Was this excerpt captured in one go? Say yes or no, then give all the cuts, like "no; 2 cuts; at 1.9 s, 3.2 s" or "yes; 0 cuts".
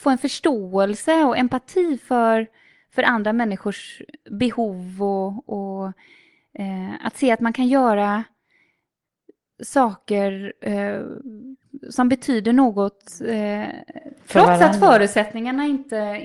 yes; 0 cuts